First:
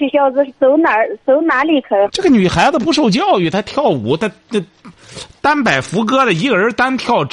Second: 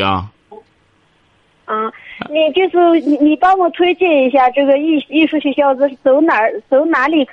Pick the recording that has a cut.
first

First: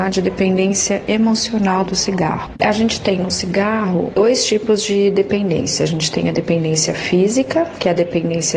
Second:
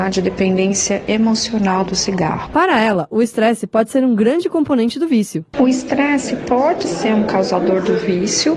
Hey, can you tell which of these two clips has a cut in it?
first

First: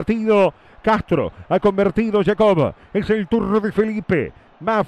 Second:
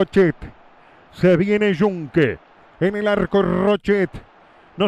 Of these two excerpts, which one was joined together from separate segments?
second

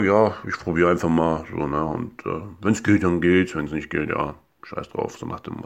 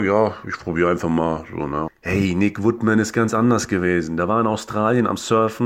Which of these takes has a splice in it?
second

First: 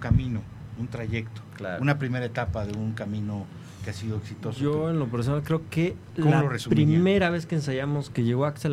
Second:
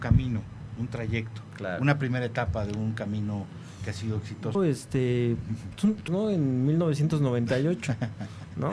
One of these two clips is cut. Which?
second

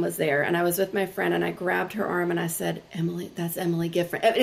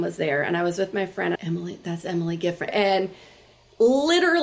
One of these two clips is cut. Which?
second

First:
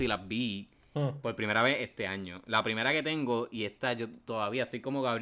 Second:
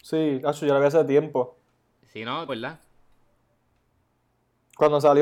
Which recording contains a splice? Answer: second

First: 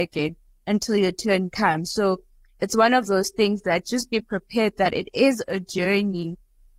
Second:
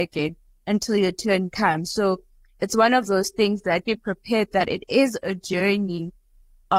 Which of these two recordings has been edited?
second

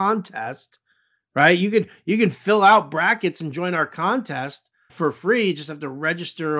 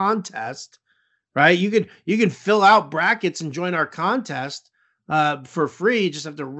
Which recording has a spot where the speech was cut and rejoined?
first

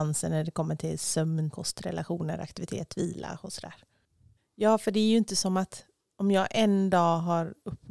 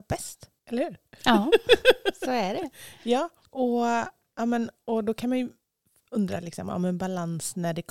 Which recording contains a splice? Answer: first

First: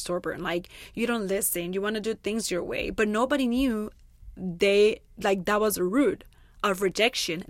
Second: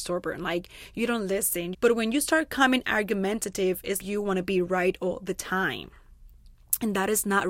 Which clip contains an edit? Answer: second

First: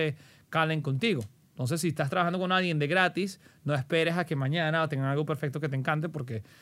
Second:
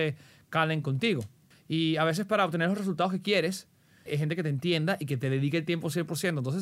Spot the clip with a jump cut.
second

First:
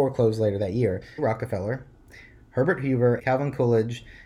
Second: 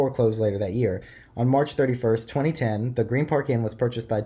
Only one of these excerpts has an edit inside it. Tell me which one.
first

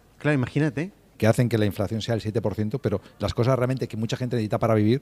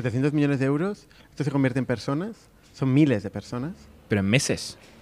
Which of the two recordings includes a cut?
first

